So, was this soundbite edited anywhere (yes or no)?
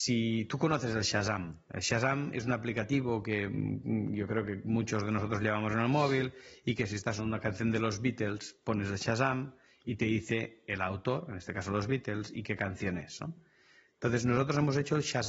yes